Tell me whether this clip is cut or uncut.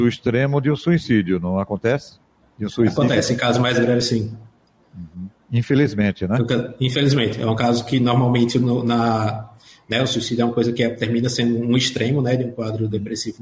uncut